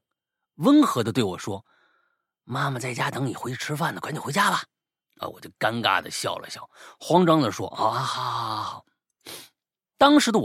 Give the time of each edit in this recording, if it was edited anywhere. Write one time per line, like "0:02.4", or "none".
none